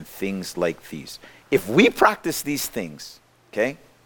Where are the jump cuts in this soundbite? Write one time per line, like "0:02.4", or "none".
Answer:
0:01.4